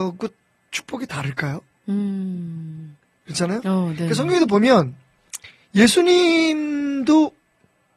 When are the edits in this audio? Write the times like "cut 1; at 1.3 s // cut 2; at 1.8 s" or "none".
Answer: none